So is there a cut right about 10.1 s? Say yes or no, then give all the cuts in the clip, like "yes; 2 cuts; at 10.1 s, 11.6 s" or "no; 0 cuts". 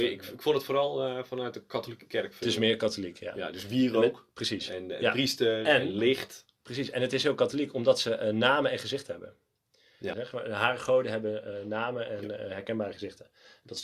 yes; 1 cut; at 10.1 s